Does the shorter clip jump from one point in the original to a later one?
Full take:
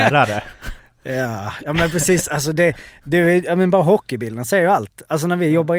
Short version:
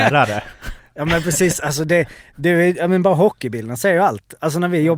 yes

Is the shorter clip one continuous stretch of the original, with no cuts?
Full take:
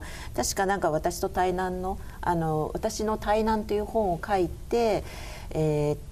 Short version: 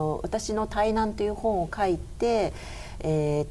yes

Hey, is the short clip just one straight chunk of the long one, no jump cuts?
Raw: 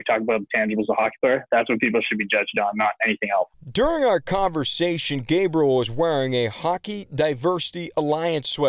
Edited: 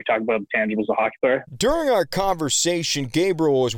no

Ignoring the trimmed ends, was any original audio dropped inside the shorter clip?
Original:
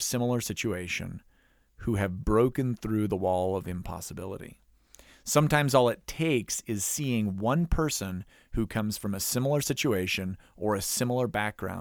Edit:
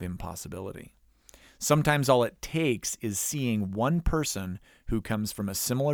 no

